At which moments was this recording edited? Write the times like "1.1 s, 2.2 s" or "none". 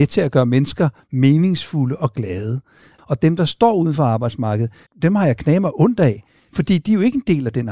3.0 s, 4.9 s